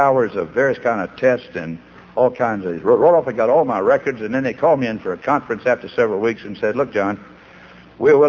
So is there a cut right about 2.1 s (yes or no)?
no